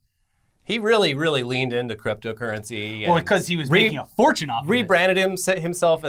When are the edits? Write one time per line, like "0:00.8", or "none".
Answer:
none